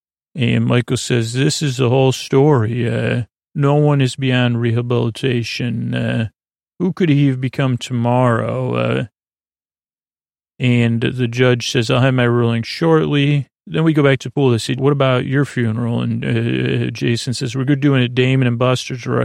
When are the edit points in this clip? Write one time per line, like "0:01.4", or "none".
0:14.8